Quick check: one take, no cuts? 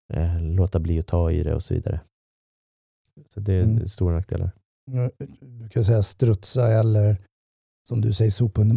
yes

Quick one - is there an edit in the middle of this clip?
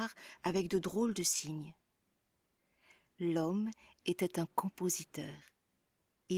no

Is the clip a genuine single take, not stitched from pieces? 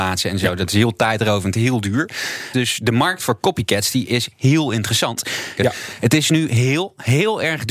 no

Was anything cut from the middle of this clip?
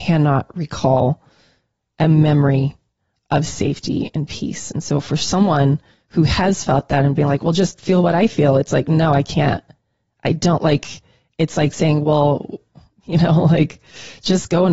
no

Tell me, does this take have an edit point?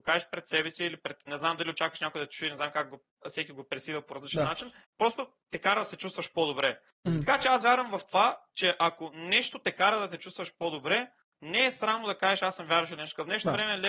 yes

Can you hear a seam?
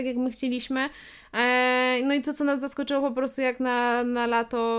no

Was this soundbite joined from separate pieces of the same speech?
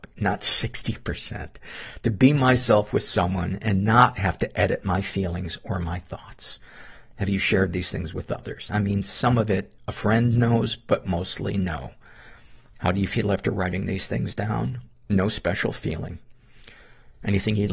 yes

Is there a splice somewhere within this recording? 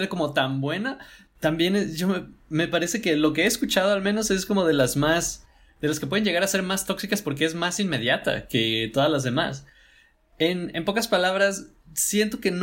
no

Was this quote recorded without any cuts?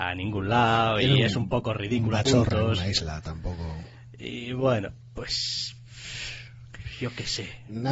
no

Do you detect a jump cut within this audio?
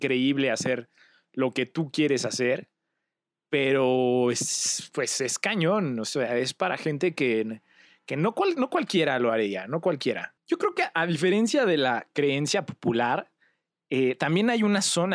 no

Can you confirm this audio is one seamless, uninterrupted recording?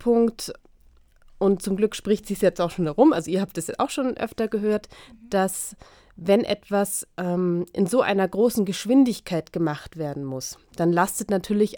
yes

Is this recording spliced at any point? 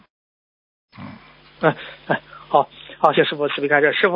yes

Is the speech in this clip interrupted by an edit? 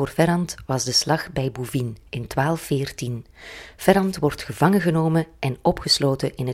no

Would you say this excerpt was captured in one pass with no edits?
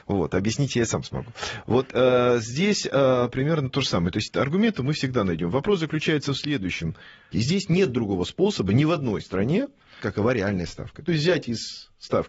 no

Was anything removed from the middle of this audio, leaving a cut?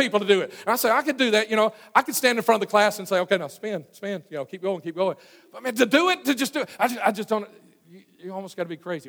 no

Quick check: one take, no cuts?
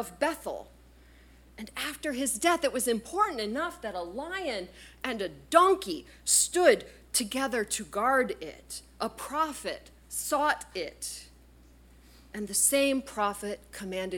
yes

